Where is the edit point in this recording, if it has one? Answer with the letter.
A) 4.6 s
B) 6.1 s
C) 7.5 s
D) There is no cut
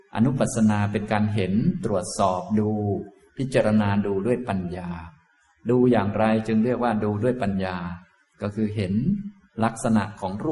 D